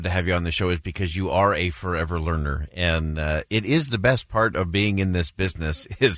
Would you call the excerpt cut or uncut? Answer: uncut